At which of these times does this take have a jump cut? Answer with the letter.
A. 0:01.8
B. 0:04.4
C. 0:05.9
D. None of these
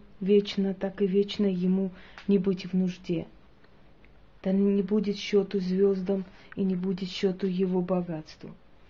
B